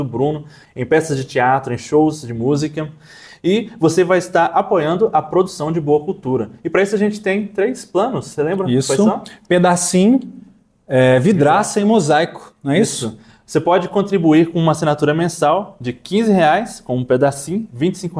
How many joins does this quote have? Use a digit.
0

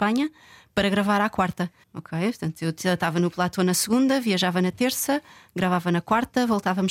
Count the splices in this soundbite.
1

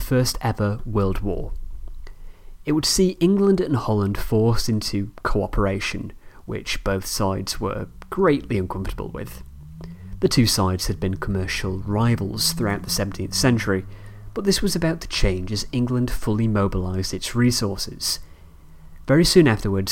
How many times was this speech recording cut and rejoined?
0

